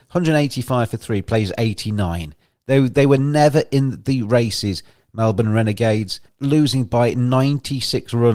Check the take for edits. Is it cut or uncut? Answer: uncut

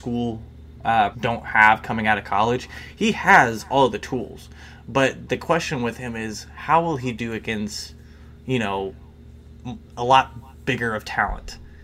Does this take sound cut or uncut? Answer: cut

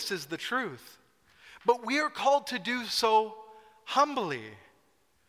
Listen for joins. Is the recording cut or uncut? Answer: uncut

